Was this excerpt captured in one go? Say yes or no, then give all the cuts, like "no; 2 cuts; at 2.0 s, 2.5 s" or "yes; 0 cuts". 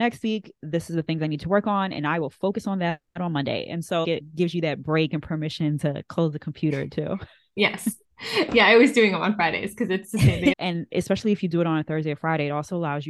no; 2 cuts; at 4.0 s, 10.5 s